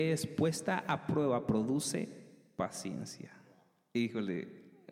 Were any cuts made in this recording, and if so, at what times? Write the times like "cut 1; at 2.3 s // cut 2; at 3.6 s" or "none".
none